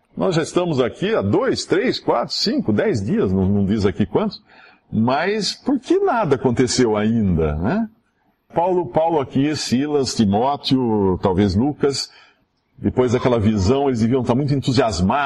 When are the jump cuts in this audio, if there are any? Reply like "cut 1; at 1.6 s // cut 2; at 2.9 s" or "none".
cut 1; at 8.5 s